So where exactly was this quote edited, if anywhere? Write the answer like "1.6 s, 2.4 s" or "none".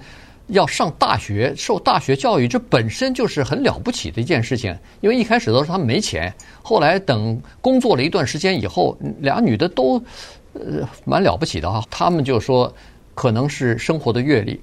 11.8 s